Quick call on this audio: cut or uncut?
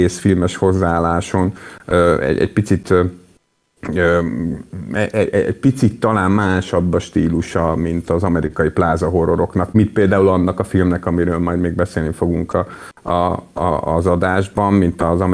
uncut